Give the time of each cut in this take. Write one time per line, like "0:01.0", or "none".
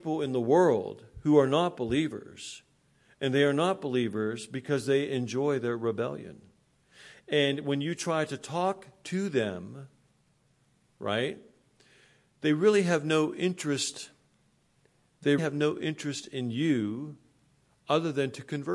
0:15.4